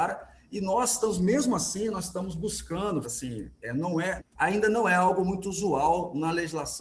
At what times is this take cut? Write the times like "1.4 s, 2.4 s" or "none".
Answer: 3.0 s, 4.2 s